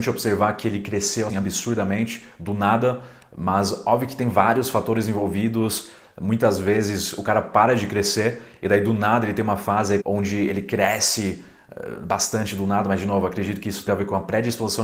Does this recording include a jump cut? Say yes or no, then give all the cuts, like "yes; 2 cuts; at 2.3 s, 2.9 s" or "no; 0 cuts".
yes; 3 cuts; at 1.3 s, 10.0 s, 13.9 s